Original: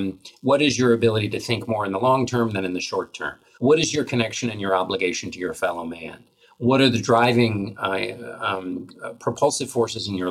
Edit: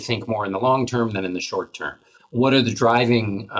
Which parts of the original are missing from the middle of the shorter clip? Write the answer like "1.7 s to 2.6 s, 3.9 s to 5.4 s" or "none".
3.6 s to 6.4 s